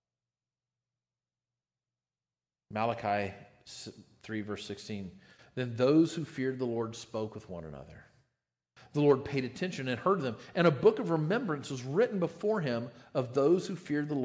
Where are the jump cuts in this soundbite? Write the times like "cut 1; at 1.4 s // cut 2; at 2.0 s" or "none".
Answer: none